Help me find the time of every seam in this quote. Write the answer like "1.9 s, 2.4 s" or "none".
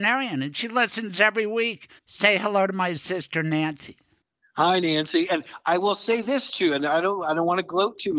2.0 s